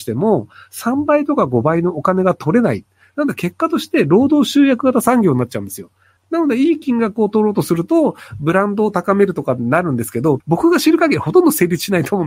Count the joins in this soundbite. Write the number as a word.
two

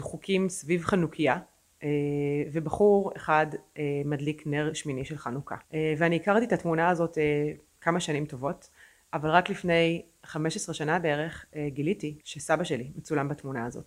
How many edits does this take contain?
two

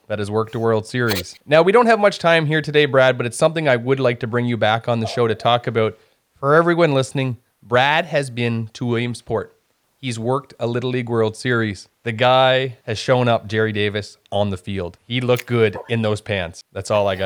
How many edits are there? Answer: zero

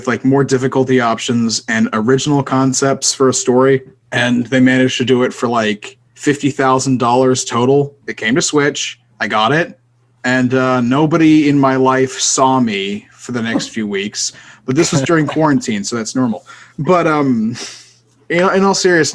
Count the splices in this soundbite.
one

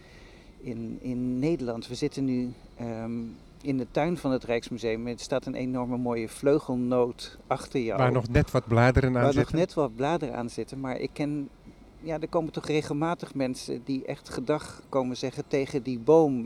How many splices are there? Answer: zero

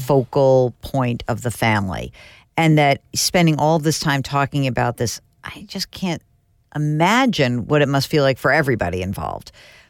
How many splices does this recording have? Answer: zero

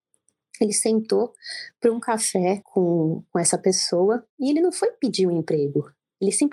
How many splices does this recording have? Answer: zero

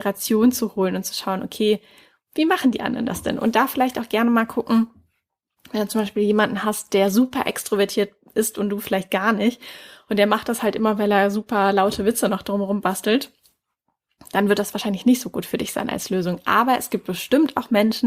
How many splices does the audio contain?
zero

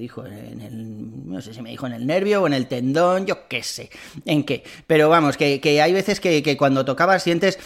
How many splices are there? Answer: zero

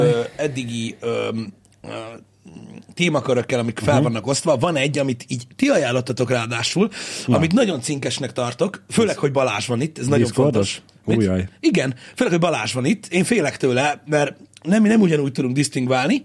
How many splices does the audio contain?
zero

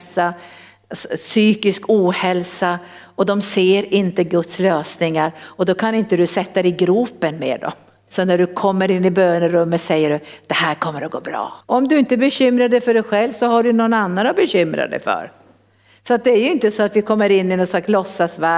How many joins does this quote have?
two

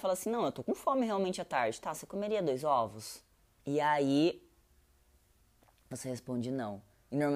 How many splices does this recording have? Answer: one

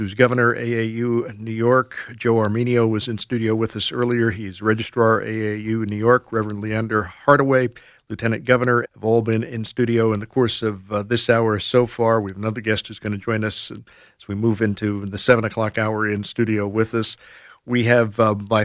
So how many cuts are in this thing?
one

